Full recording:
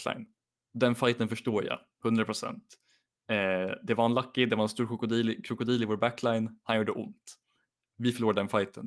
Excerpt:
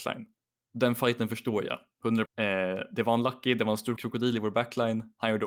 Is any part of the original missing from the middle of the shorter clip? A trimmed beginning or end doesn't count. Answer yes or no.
yes